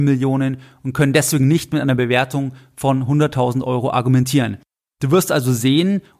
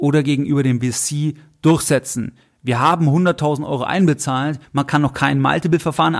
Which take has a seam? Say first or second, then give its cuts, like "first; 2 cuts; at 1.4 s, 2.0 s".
second; 1 cut; at 4.6 s